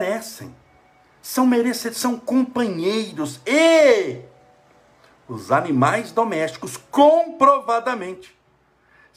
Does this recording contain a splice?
no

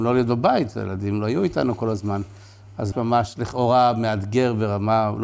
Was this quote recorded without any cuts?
no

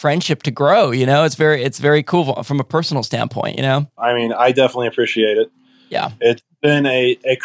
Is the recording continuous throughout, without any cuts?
yes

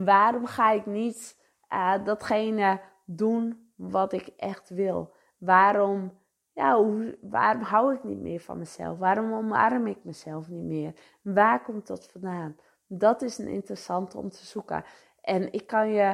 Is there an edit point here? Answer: no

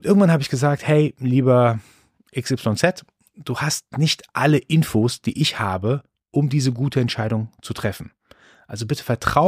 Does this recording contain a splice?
no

